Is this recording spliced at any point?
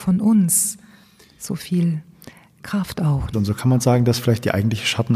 yes; 1 cut; at 3.3 s

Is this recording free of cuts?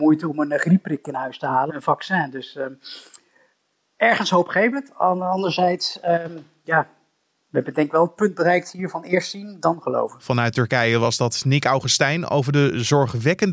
no; 1 cut; at 1.7 s

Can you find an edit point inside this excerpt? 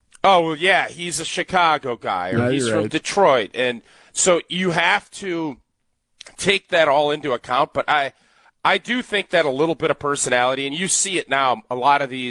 no; 0 cuts

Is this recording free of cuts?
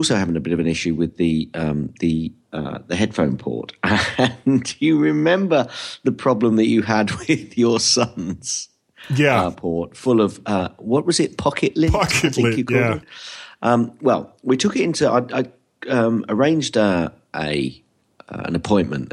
yes; 0 cuts

